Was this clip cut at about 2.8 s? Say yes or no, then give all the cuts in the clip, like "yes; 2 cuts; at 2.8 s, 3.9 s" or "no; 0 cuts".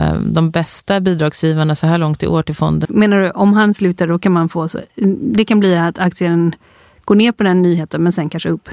yes; 1 cut; at 2.8 s